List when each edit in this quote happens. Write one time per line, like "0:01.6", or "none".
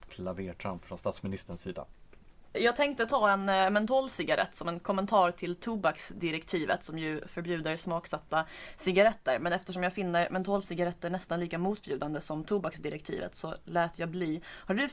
0:02.5